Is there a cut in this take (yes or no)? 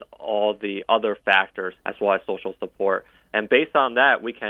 yes